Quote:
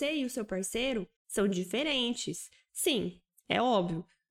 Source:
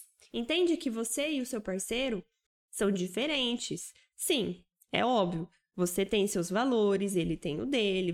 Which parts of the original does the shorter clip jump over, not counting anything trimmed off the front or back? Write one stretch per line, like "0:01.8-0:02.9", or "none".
0:02.3-0:02.6